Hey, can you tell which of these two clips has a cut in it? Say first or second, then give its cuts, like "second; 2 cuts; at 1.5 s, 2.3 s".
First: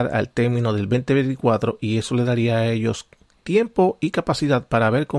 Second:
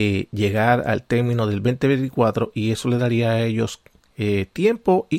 first; 1 cut; at 3.4 s